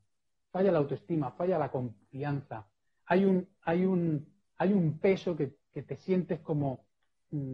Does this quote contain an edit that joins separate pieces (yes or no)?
no